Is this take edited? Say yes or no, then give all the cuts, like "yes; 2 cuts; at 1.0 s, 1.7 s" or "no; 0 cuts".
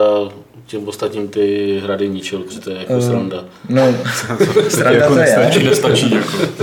yes; 1 cut; at 2.5 s